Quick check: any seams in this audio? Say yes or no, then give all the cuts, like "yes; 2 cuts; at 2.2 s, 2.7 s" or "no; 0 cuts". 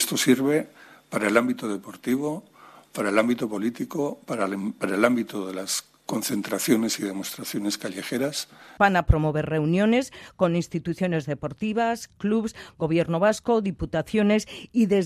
yes; 1 cut; at 8.8 s